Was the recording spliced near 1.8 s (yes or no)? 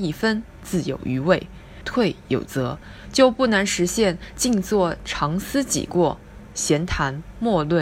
yes